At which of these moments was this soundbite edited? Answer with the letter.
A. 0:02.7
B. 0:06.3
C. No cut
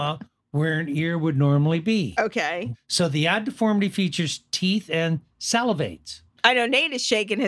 A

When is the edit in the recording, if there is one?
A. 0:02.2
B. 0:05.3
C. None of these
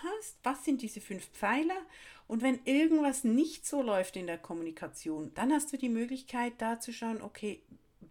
B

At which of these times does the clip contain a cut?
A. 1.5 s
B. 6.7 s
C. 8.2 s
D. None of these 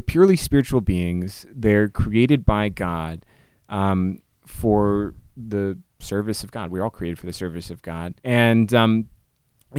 C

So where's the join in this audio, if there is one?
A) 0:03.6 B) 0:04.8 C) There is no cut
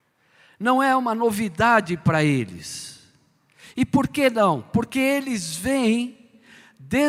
C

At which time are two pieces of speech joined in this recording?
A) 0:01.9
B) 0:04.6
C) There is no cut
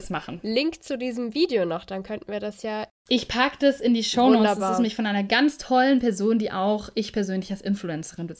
C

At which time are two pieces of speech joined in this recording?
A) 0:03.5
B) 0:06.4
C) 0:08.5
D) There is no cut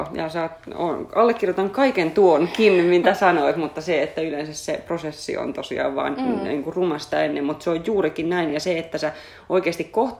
D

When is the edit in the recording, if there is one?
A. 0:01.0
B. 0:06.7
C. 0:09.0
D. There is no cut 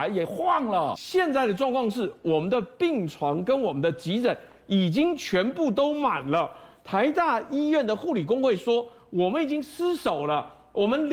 D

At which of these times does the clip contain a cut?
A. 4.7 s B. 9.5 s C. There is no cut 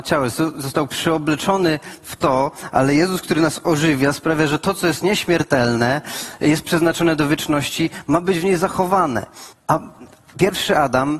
B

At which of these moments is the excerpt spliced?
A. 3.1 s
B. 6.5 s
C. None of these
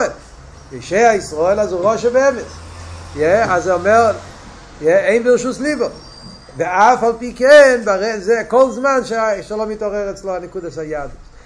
C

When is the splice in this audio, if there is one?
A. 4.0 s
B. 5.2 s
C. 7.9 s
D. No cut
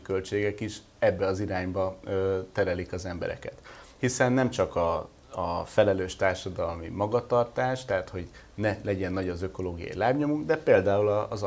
A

